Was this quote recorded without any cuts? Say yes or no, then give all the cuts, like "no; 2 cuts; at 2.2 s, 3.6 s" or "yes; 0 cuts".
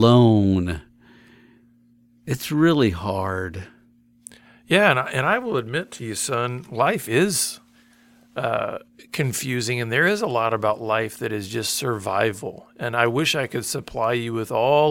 yes; 0 cuts